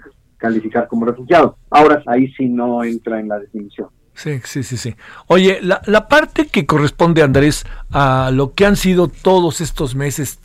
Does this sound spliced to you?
yes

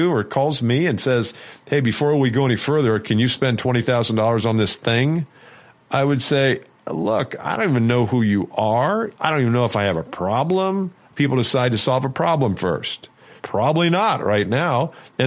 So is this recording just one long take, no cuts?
no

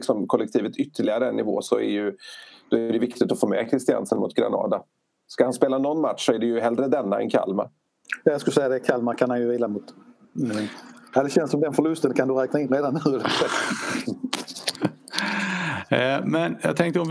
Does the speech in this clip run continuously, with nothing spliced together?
no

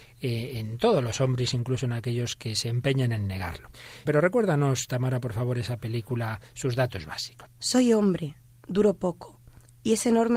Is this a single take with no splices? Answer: no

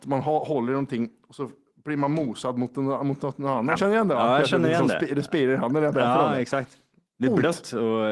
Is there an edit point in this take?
yes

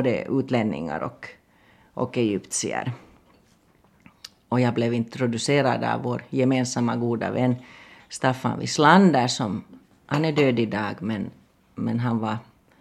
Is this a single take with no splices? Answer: yes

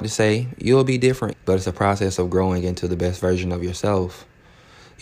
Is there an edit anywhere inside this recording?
yes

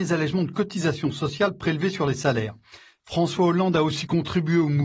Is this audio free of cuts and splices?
no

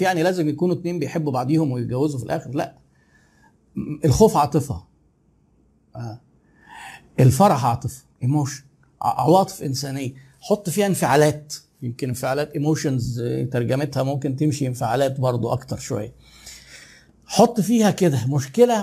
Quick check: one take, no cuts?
no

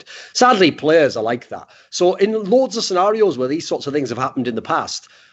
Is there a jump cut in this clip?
no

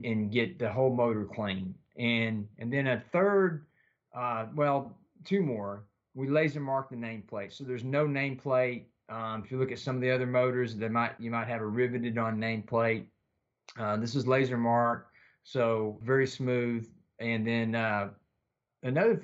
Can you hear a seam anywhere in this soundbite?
no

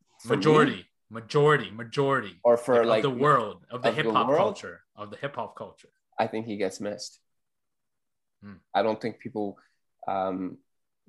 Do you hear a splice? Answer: no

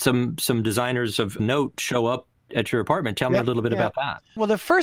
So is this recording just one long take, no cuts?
yes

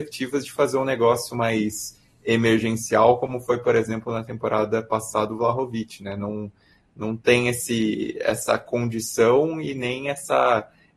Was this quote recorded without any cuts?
yes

